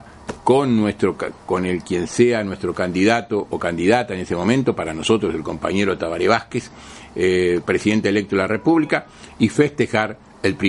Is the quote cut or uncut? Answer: cut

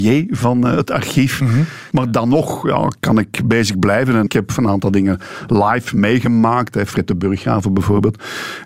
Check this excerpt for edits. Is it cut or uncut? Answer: cut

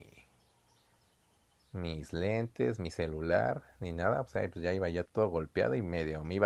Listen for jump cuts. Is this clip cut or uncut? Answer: cut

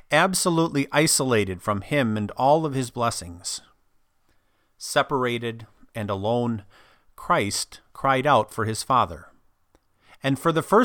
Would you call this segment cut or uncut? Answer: uncut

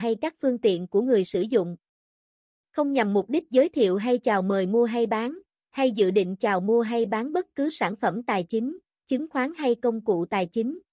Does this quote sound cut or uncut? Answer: cut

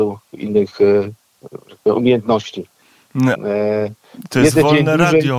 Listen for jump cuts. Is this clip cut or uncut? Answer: cut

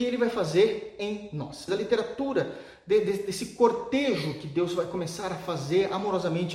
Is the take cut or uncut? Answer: cut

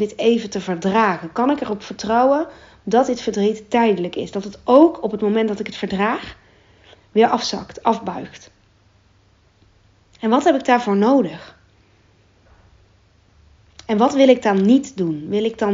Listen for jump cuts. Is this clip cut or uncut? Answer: uncut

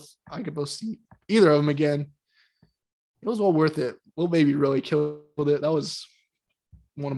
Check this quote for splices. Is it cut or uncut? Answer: uncut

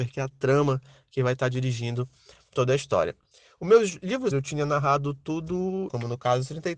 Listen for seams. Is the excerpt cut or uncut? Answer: cut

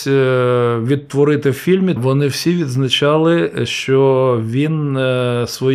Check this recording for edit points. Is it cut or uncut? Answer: cut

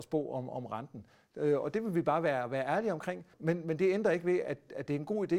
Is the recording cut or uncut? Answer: cut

